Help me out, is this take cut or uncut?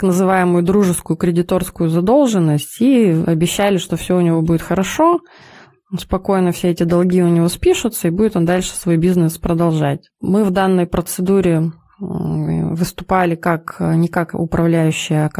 uncut